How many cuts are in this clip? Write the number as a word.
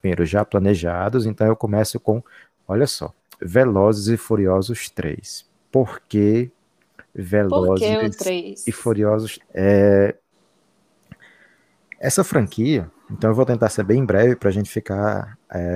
one